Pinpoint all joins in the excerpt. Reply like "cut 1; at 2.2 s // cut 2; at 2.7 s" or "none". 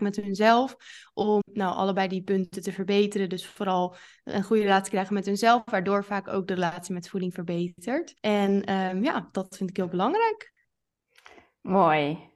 cut 1; at 1.4 s // cut 2; at 8.2 s